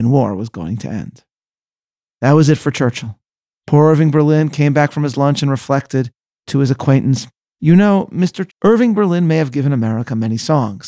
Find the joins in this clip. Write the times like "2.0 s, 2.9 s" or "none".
8.5 s